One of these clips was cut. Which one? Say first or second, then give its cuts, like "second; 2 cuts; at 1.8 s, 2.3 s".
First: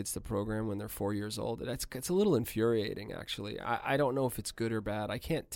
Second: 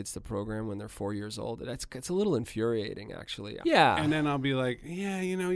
second; 1 cut; at 3.6 s